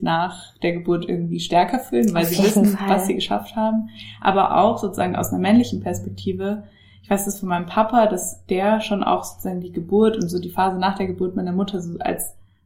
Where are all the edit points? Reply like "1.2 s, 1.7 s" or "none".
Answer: none